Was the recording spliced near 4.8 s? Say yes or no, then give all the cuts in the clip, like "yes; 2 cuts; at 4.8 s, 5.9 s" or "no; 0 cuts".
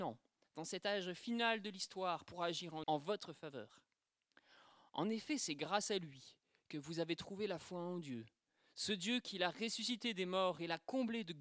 no; 1 cut; at 2.8 s